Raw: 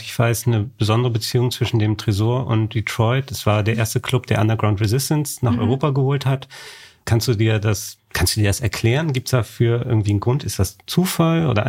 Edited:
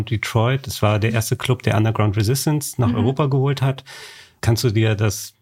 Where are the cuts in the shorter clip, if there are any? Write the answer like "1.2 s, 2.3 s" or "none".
none